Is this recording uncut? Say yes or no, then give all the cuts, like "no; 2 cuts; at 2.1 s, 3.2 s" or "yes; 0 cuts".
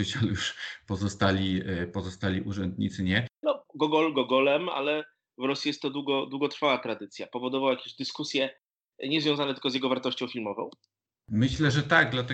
no; 1 cut; at 3.4 s